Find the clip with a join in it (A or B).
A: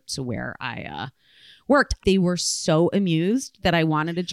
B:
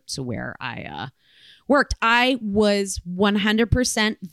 A